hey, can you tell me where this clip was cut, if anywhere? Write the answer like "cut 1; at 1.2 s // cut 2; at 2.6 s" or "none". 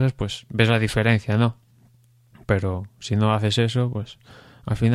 none